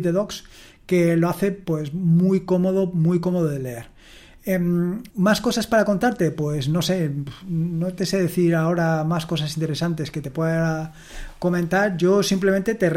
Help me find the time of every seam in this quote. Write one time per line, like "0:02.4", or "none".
0:05.1

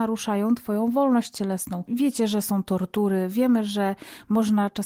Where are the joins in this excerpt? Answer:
0:01.9

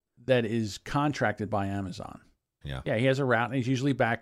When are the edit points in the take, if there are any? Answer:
0:02.6

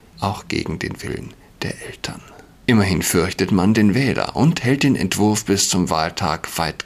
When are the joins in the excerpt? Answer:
none

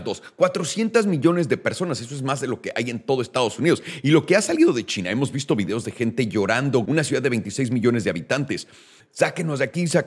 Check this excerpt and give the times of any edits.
0:06.8
0:09.0

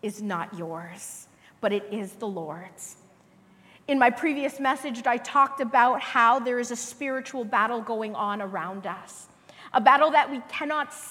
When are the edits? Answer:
none

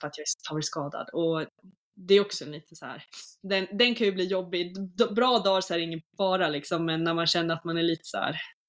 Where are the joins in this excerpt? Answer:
none

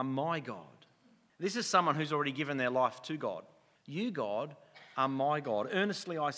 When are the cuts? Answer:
0:01.3
0:03.8

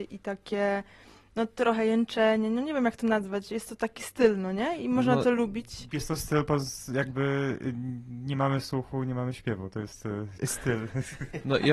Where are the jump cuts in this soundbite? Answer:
0:10.4

